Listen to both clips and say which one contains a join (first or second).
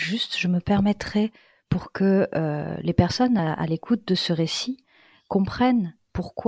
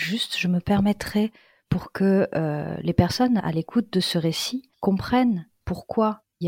second